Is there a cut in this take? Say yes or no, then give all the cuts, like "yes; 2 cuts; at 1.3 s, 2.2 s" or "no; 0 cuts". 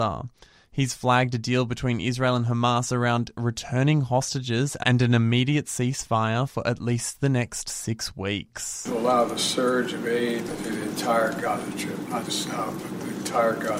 yes; 2 cuts; at 10.5 s, 12.3 s